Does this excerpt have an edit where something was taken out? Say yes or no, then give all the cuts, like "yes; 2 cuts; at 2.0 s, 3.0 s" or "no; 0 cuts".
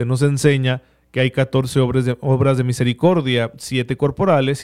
no; 0 cuts